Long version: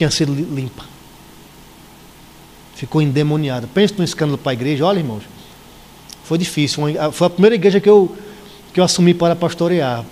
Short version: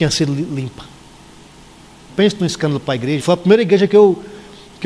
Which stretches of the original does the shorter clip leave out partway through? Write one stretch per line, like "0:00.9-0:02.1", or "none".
0:02.1-0:03.7
0:04.8-0:07.1